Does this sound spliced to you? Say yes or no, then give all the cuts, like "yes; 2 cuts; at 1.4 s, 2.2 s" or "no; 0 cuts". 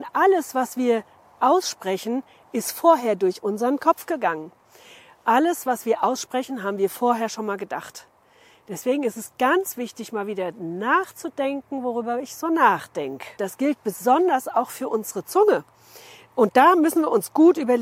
yes; 1 cut; at 13.4 s